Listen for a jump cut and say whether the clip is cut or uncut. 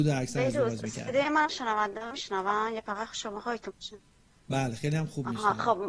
uncut